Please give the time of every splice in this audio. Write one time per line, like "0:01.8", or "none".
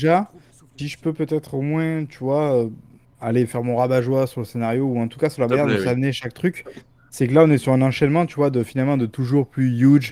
none